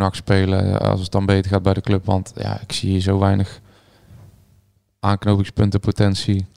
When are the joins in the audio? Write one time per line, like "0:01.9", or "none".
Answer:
none